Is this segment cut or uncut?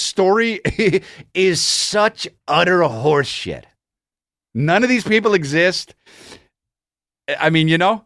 uncut